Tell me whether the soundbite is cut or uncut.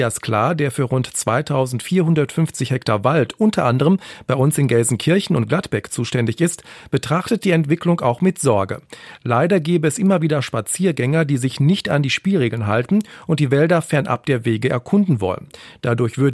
uncut